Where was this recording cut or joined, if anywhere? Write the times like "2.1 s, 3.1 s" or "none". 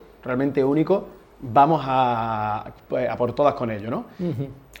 none